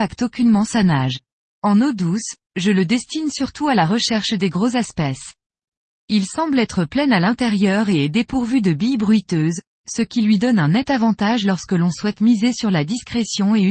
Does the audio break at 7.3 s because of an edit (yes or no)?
no